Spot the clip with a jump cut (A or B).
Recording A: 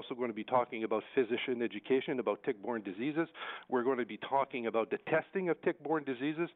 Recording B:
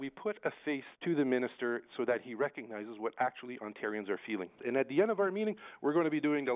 B